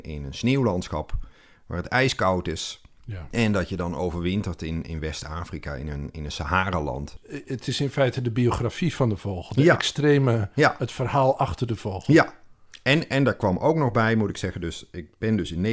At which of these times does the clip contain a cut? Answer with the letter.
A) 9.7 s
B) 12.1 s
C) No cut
C